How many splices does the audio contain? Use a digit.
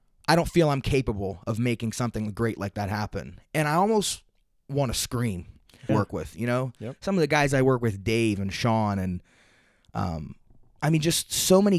1